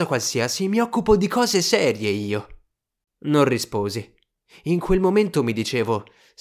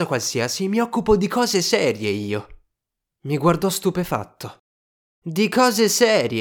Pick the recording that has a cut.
first; 1 cut; at 3.0 s

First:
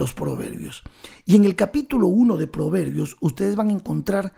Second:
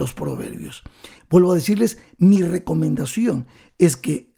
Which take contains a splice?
second; 1 cut; at 1.2 s

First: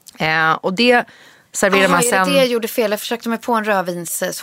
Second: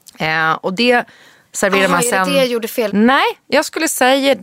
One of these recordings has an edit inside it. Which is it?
second; 1 cut; at 2.9 s

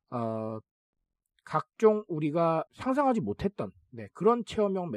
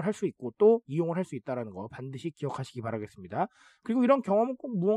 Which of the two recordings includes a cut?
first; 1 cut; at 2.7 s

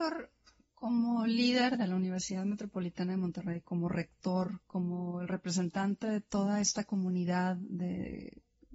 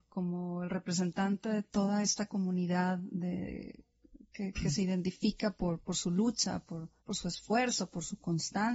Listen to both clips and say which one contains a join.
second; 1 cut; at 7.0 s

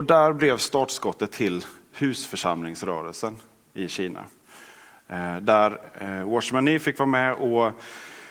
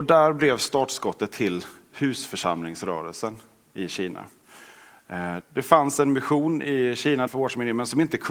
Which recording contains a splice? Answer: second; 2 cuts; at 5.4 s, 7.3 s

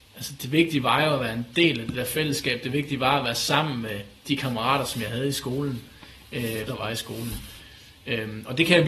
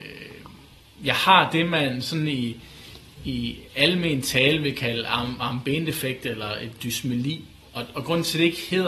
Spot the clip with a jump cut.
first; 1 cut; at 6.7 s

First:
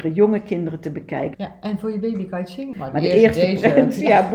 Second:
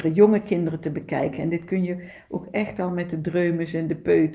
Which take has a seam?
first; 2 cuts; at 1.3 s, 2.7 s

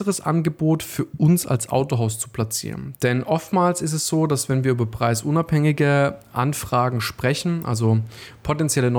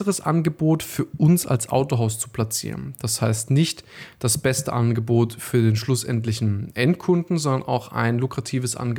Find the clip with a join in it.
first; 1 cut; at 3.0 s

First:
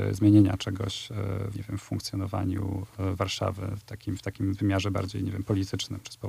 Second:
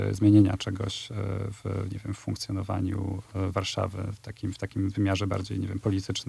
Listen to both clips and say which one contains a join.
first; 1 cut; at 1.5 s

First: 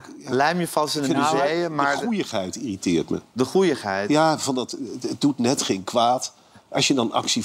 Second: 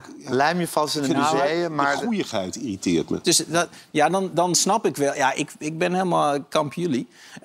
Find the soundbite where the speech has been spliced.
second; 1 cut; at 3.2 s

